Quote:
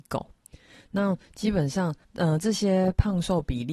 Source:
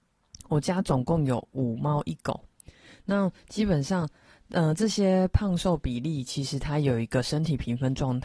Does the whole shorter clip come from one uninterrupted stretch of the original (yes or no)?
no